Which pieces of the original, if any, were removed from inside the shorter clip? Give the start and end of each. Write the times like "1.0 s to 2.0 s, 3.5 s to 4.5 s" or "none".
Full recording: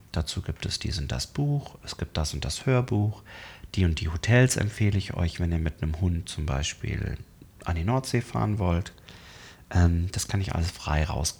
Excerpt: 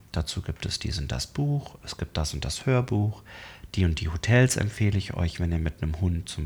none

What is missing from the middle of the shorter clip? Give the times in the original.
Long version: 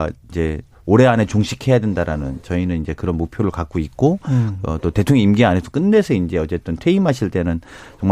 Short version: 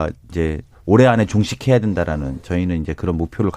none

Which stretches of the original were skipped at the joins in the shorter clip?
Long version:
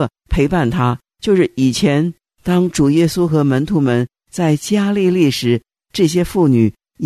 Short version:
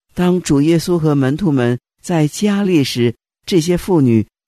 4.9 s to 5.1 s

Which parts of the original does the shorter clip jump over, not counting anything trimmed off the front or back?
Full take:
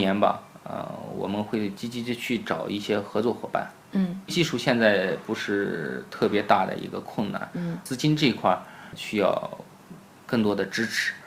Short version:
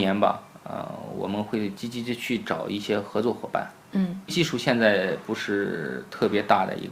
none

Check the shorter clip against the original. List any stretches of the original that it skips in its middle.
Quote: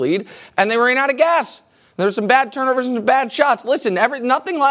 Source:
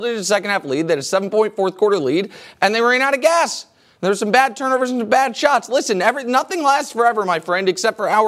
none

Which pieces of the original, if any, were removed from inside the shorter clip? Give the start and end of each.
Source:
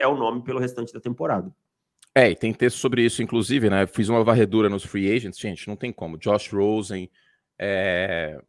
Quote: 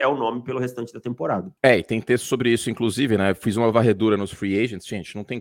1.6 s to 2.1 s

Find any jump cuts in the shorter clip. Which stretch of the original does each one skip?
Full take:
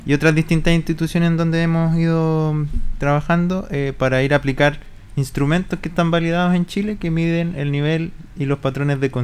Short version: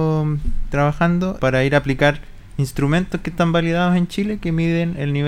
3.7 s to 4.0 s

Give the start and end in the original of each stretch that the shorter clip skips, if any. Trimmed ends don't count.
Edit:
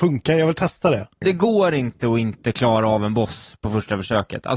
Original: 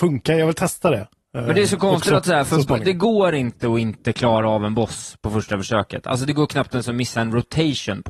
1.2 s to 2.8 s

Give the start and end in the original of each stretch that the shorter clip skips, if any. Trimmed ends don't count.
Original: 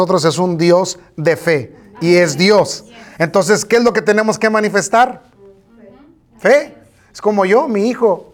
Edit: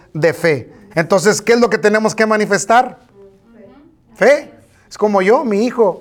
1.9 s to 3.1 s

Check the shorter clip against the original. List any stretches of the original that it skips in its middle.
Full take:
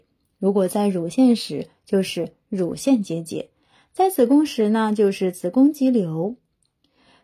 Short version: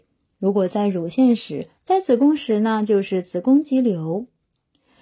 1.8 s to 3.8 s

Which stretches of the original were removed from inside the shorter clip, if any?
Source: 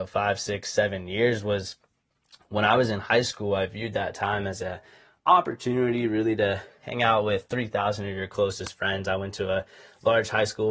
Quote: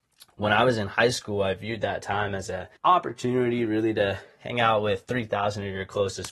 4.9 s to 5.2 s

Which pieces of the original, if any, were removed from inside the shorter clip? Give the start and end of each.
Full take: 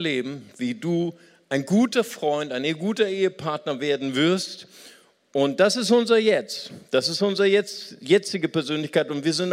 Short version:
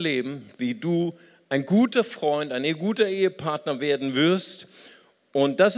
none

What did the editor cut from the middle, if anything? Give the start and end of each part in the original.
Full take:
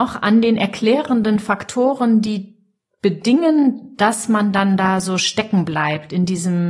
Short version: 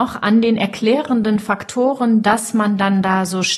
2.2 s to 4.0 s

